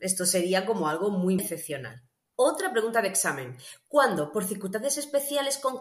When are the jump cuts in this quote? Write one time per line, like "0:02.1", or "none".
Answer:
0:01.4